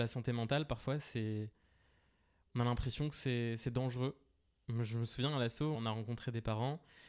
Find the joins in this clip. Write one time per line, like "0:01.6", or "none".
0:05.7